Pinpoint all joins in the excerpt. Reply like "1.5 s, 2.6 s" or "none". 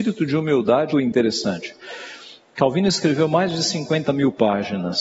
0.9 s